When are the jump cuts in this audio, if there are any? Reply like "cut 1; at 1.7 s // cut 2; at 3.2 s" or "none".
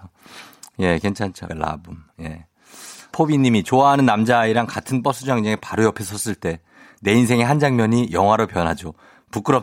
cut 1; at 1.5 s // cut 2; at 3.1 s